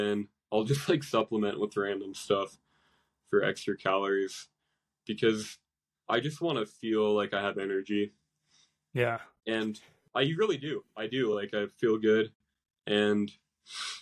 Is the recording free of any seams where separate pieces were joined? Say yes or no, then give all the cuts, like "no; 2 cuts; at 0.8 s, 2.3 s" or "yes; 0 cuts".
yes; 0 cuts